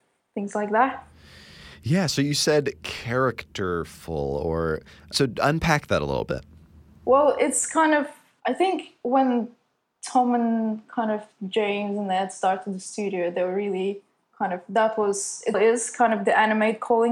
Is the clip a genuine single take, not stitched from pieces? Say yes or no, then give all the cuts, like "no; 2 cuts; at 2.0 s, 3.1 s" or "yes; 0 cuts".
no; 1 cut; at 15.5 s